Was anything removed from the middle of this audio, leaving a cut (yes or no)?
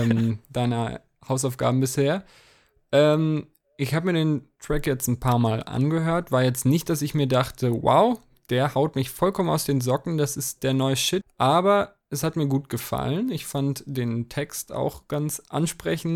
yes